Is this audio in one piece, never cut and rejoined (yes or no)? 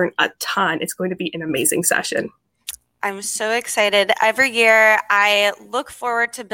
yes